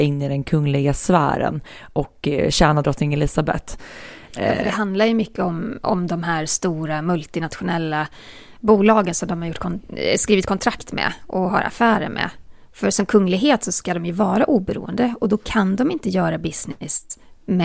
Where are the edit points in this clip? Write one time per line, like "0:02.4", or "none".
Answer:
none